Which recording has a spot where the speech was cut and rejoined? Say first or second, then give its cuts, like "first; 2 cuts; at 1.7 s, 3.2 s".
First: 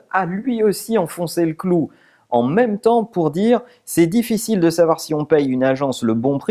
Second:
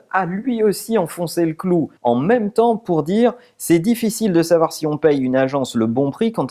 second; 1 cut; at 2.0 s